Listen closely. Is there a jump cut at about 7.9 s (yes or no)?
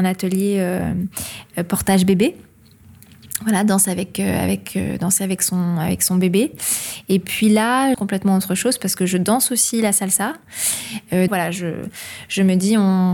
yes